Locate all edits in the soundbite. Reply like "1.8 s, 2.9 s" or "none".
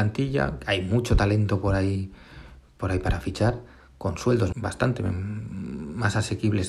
4.5 s